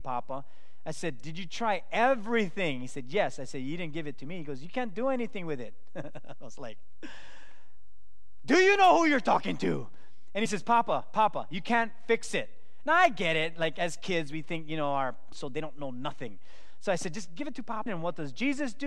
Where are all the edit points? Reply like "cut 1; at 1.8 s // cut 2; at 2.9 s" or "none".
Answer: cut 1; at 15.3 s // cut 2; at 17.9 s